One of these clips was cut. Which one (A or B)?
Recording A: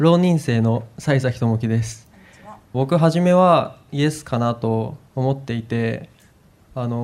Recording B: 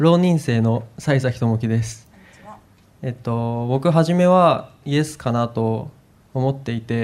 A